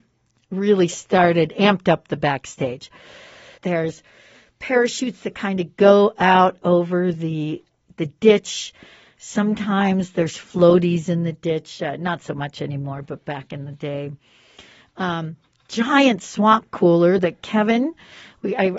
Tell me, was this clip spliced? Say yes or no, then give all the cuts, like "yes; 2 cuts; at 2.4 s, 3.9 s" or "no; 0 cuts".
yes; 1 cut; at 3.6 s